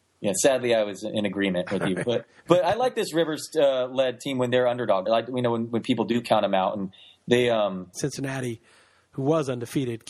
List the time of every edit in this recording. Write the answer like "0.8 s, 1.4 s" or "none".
5.1 s, 7.9 s